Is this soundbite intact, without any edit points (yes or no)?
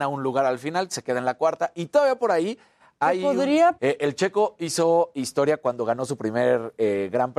no